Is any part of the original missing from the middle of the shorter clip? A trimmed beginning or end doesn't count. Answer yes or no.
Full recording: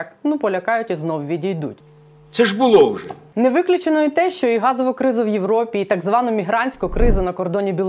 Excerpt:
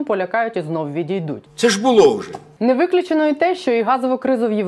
yes